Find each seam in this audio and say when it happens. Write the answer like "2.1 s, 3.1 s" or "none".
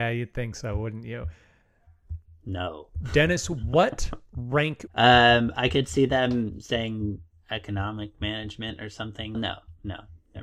4.9 s, 9.3 s